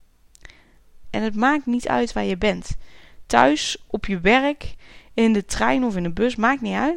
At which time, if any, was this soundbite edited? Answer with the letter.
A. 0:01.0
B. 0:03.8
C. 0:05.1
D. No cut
A